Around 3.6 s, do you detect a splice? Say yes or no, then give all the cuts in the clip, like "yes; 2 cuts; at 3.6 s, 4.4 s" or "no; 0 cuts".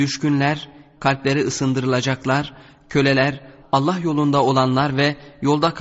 yes; 2 cuts; at 1.0 s, 3.6 s